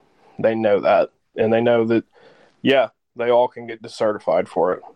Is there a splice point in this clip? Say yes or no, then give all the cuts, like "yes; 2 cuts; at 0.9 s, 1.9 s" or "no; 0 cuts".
no; 0 cuts